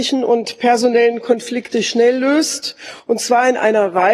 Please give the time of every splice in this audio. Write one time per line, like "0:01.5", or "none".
none

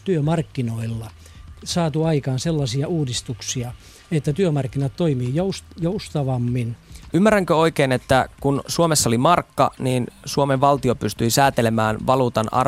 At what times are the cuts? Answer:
0:07.1

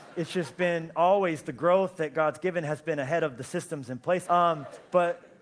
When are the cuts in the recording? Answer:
0:04.3

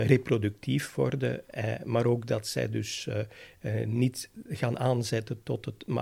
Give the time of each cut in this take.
none

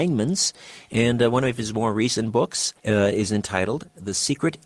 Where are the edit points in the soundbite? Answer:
0:02.8

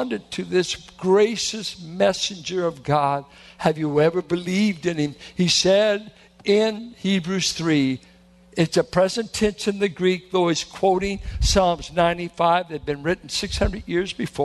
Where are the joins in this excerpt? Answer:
none

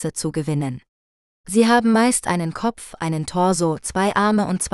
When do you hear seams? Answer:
0:01.3

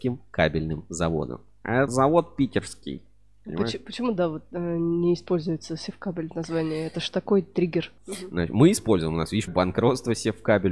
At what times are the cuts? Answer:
0:01.9
0:08.0
0:09.5

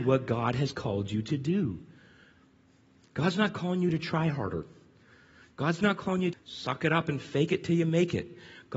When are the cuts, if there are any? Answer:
0:06.3

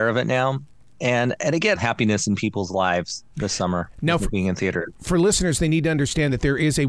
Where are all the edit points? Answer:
0:01.7

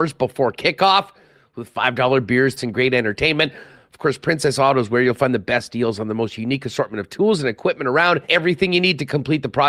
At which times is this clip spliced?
0:02.6
0:08.2

